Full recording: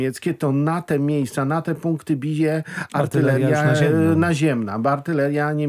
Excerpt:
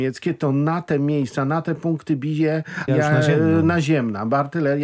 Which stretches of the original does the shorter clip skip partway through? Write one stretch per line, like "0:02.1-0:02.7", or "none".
0:02.9-0:03.4